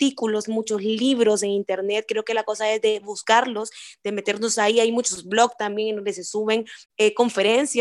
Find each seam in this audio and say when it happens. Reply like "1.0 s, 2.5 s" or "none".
6.8 s